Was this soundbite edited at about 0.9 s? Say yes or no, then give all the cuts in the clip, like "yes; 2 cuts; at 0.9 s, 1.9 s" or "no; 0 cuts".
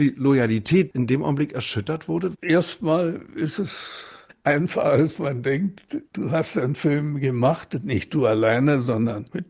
yes; 1 cut; at 0.9 s